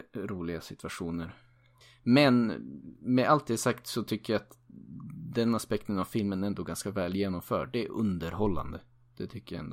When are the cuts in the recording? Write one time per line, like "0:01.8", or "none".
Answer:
none